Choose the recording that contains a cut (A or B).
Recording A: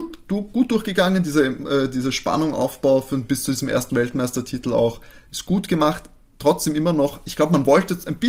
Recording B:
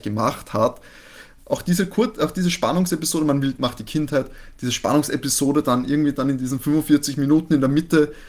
B